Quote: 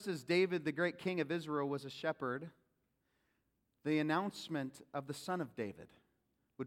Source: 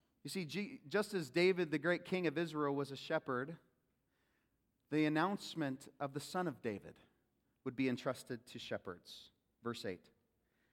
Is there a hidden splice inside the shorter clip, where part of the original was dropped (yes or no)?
no